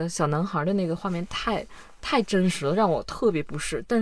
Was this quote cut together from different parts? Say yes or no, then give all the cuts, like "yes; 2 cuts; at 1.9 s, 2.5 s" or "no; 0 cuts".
no; 0 cuts